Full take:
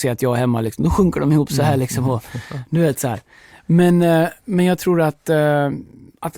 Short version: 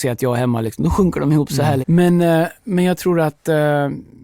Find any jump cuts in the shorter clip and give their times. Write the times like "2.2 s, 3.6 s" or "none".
1.8 s